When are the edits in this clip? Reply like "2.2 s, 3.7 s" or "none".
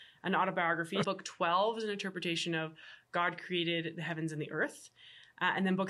1.0 s